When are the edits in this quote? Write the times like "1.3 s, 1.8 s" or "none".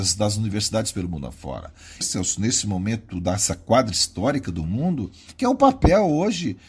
2.0 s